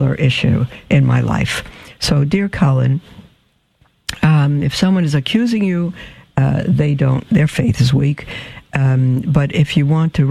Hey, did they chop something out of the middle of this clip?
no; 0 cuts

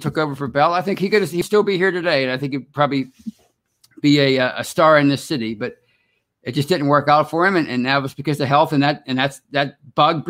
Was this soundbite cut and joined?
no; 0 cuts

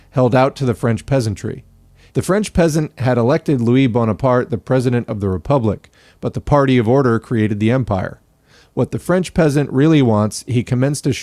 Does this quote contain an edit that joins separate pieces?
yes; 1 cut; at 2.1 s

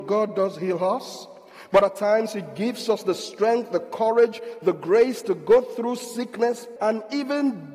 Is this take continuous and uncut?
no; 1 cut; at 6.8 s

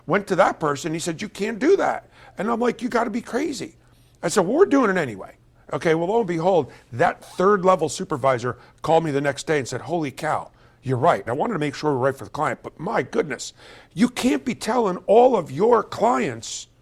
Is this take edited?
yes; 1 cut; at 11.3 s

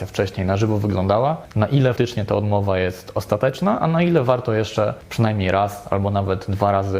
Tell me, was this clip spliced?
yes; 1 cut; at 2.0 s

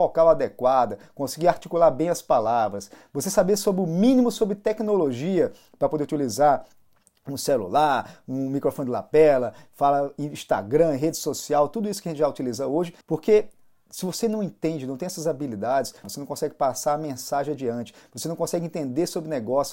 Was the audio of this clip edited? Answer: yes; 2 cuts; at 13.0 s, 16.0 s

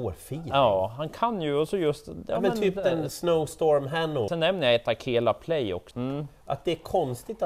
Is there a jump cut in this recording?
yes; 2 cuts; at 4.3 s, 5.9 s

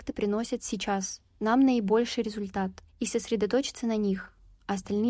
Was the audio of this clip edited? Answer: yes; 1 cut; at 2.9 s

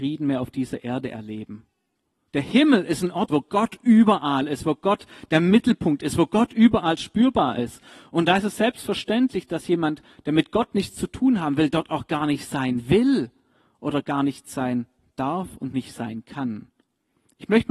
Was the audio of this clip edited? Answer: yes; 2 cuts; at 2.3 s, 3.3 s

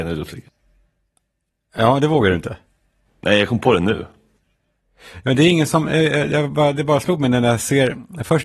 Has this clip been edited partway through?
no; 0 cuts

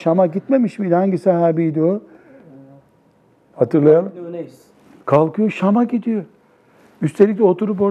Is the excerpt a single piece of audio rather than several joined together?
yes; 0 cuts

